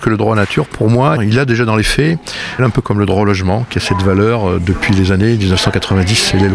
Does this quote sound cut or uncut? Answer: cut